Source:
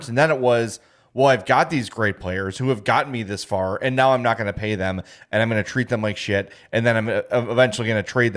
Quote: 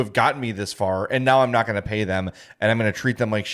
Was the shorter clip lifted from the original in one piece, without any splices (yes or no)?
yes